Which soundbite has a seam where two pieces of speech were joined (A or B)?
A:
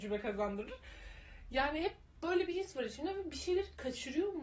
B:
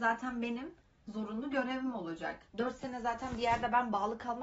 B